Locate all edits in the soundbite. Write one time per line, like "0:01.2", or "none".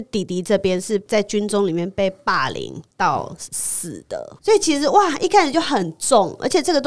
0:04.4